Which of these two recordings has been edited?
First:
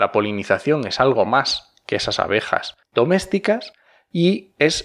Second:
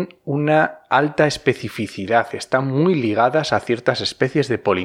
first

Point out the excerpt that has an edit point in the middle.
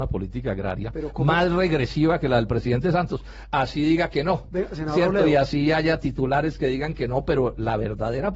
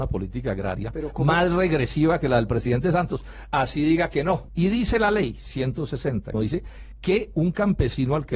second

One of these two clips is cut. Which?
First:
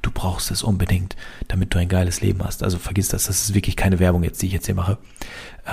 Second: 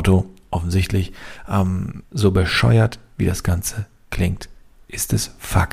second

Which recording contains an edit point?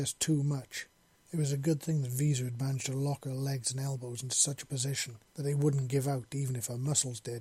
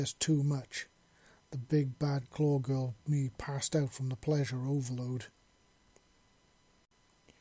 first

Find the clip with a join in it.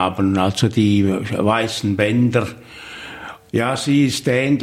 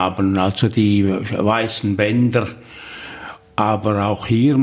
first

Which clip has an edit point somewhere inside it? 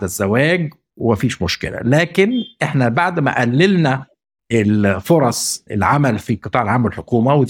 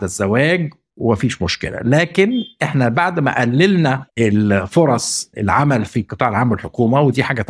second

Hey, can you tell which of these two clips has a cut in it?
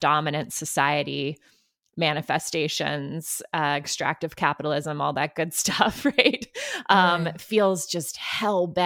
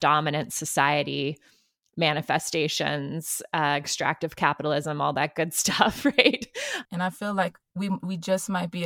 second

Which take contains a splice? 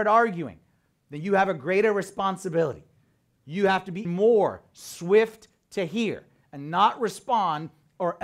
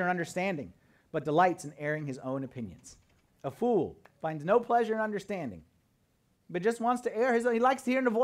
first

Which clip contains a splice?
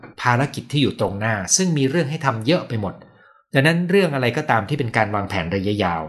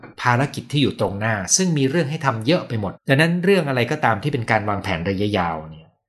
second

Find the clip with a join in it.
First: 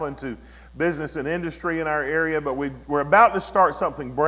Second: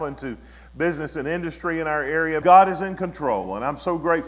second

